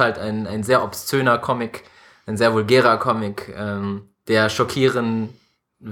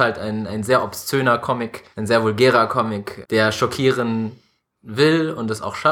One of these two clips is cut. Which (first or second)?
second